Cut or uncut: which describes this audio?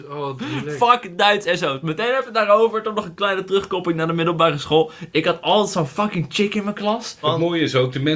cut